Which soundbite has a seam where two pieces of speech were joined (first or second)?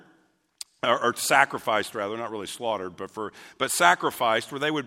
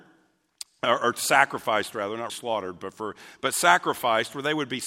second